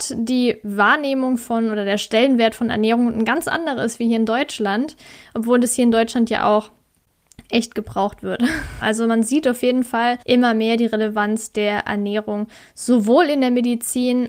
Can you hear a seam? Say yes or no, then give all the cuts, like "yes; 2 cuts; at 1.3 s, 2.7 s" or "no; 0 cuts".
yes; 2 cuts; at 8.8 s, 10.2 s